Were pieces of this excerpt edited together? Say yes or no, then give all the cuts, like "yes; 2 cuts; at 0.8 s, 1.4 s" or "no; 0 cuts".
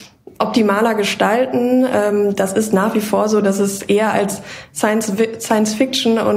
no; 0 cuts